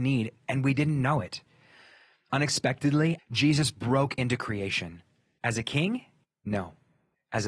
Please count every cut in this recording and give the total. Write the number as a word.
two